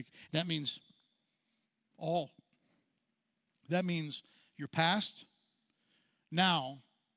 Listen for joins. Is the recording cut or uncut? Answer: uncut